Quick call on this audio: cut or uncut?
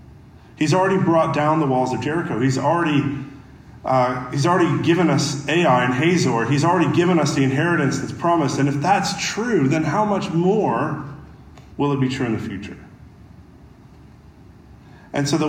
uncut